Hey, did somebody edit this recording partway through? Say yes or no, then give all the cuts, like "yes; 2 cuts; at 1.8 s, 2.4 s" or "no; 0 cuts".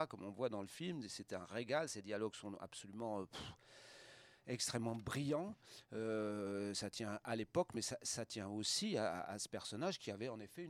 no; 0 cuts